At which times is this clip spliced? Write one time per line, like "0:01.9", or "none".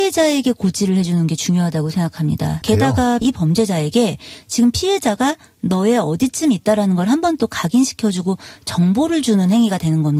0:02.6